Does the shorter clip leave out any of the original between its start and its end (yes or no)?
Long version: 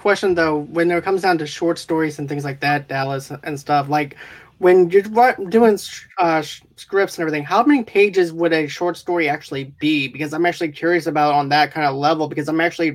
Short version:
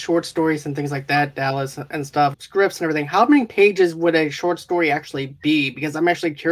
yes